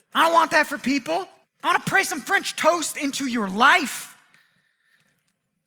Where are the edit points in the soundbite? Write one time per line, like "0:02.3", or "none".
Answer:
0:01.4